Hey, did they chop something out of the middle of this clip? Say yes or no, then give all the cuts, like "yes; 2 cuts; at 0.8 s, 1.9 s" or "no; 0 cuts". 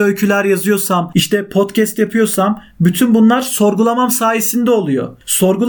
yes; 1 cut; at 1.1 s